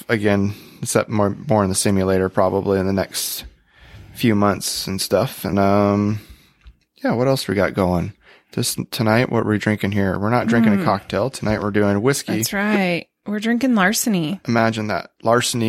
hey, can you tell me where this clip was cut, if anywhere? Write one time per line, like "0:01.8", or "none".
0:05.5